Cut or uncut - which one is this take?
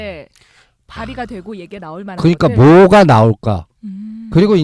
uncut